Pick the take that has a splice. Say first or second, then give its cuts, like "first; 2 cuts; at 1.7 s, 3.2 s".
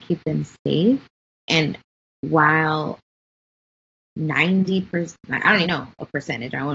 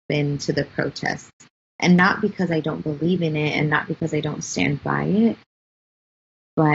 first; 1 cut; at 5.6 s